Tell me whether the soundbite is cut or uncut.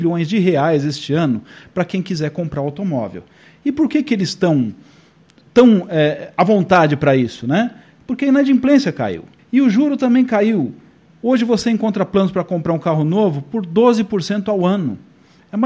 uncut